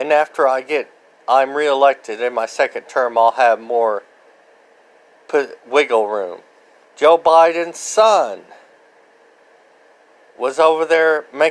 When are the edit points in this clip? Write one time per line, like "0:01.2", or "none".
0:06.9